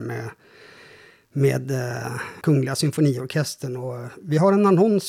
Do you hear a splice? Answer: yes; 1 cut; at 2.4 s

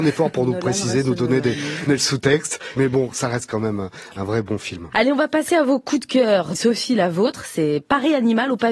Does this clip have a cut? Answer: yes; 3 cuts; at 1.9 s, 4.9 s, 6.6 s

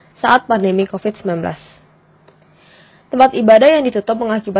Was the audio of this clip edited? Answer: no; 0 cuts

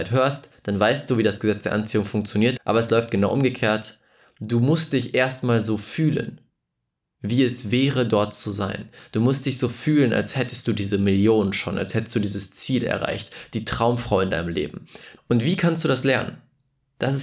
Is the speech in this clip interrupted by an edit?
yes; 2 cuts; at 2.6 s, 15.2 s

